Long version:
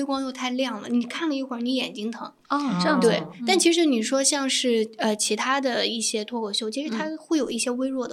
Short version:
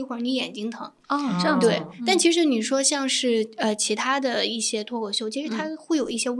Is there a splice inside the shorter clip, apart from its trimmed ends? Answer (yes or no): no